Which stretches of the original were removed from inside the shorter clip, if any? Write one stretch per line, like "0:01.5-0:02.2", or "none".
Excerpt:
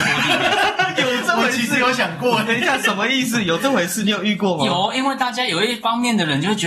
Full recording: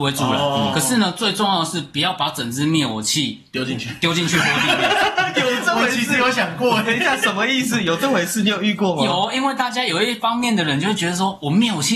none